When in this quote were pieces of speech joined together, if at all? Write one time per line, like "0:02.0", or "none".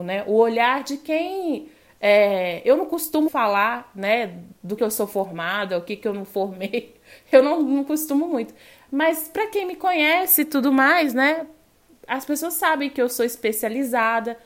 0:03.3
0:04.8